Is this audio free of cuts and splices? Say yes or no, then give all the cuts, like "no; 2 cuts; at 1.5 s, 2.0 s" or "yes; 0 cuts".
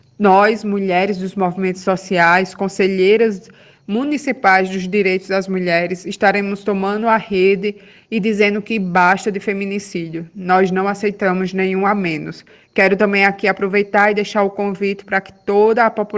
yes; 0 cuts